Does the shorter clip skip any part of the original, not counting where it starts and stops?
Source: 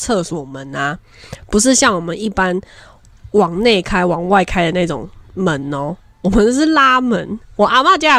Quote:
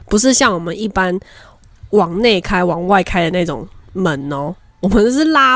no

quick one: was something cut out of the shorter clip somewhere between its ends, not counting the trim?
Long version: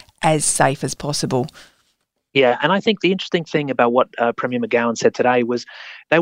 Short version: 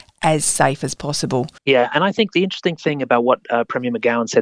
yes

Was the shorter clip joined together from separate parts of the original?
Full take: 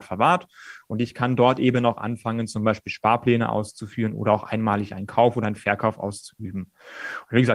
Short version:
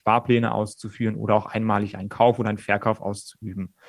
no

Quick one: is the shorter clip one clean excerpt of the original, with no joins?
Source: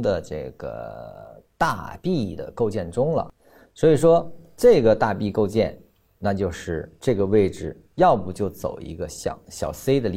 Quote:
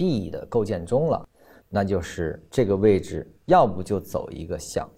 no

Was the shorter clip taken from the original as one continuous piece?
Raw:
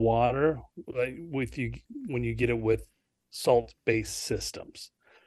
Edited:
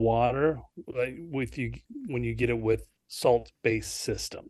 no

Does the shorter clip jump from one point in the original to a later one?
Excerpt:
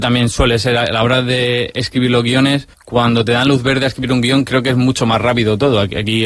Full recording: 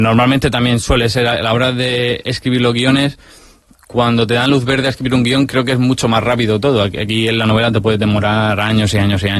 yes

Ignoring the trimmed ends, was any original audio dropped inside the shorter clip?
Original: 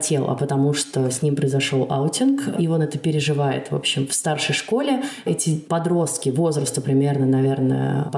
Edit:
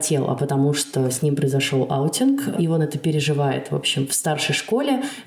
no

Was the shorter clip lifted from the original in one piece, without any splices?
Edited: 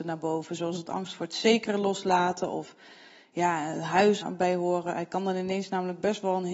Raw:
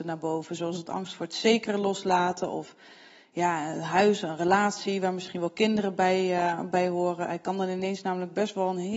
no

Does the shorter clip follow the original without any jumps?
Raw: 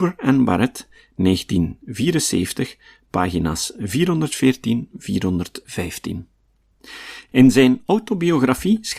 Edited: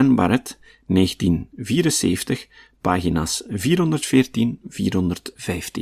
yes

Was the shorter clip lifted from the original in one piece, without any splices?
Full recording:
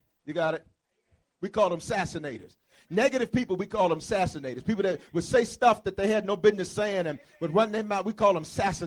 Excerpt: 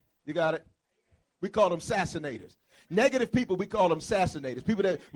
yes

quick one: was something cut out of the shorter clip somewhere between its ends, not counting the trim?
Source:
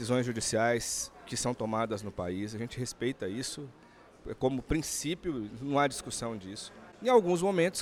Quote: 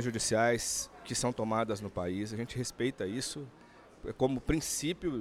no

